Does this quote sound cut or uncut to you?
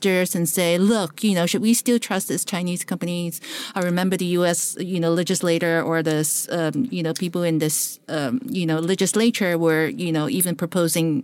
uncut